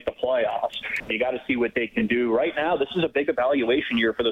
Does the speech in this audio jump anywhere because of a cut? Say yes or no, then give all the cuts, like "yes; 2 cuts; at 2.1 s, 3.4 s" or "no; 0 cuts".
yes; 1 cut; at 1.1 s